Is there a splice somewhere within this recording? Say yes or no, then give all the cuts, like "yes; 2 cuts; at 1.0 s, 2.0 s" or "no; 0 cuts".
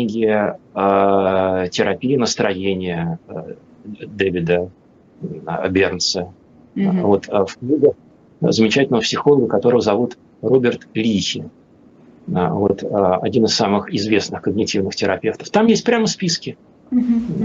no; 0 cuts